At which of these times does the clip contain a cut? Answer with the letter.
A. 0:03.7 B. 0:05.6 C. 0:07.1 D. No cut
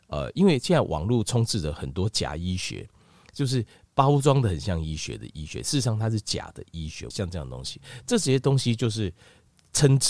C